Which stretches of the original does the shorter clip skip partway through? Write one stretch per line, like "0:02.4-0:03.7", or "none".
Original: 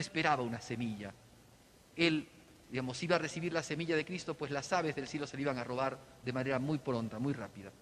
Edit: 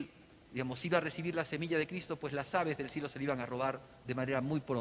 none

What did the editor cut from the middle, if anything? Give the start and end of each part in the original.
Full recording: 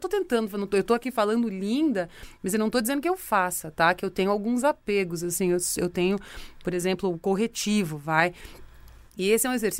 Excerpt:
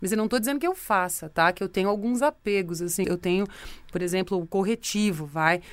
0:05.5-0:05.8

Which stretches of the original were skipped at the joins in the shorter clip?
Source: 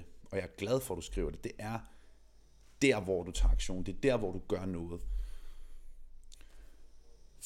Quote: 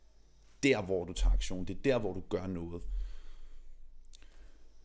none

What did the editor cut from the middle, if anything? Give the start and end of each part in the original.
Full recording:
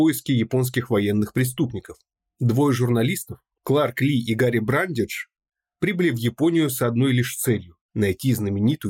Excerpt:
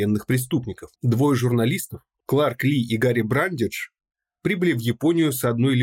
0:02.0-0:02.3

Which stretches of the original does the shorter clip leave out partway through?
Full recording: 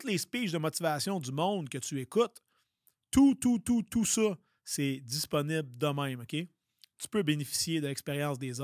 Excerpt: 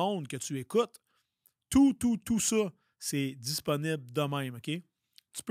0:03.4-0:03.6

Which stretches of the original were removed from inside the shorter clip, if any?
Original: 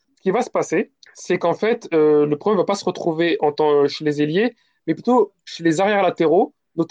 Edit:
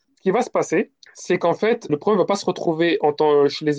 0:01.9-0:02.3

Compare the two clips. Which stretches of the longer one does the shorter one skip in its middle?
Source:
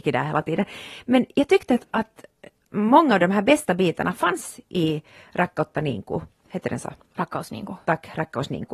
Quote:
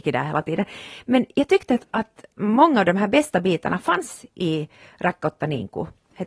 0:02.3-0:02.7

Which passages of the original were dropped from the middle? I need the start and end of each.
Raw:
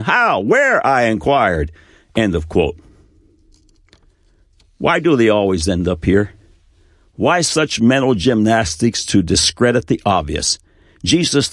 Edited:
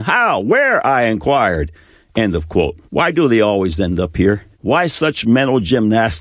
0:02.9-0:04.7
0:06.4-0:07.1

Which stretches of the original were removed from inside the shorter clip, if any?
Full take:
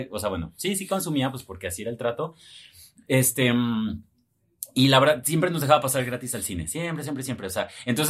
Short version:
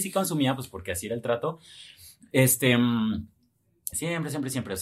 0:04.7-0:06.7

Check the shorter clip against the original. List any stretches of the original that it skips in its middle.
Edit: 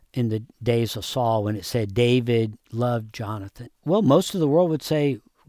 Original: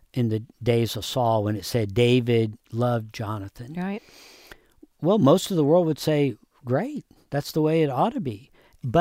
0:03.7-0:04.8

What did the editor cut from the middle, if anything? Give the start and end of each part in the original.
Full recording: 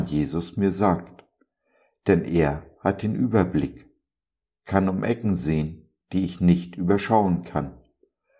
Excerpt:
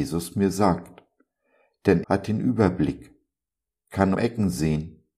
0:02.2-0:02.8
0:04.9-0:05.0

